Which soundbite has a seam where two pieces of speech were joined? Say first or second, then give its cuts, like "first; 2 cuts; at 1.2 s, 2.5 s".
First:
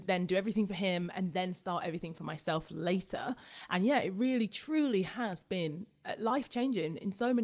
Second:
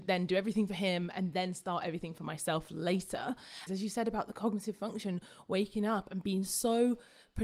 second; 1 cut; at 3.7 s